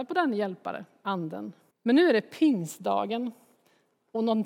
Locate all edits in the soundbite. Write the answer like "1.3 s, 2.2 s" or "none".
1.7 s